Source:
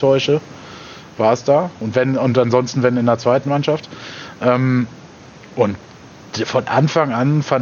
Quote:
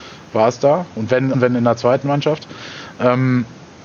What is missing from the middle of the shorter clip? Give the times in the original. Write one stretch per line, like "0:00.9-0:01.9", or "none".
0:02.2-0:02.7